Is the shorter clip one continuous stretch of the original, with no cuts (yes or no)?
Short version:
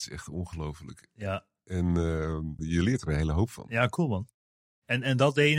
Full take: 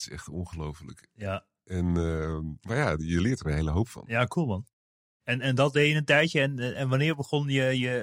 no